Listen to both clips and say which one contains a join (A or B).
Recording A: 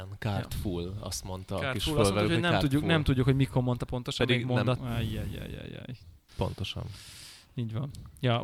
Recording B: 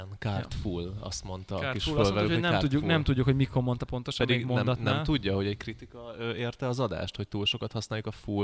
A